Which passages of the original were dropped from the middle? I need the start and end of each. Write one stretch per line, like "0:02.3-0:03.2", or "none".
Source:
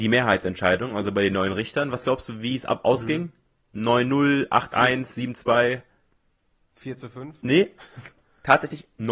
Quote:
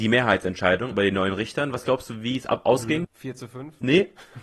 0:00.9-0:01.1
0:03.2-0:06.7